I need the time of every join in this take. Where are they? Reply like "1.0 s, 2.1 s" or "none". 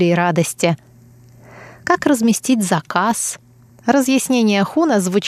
3.7 s